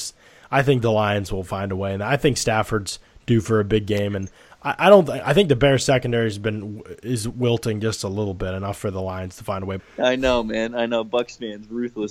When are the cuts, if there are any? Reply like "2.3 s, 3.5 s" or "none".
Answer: 9.8 s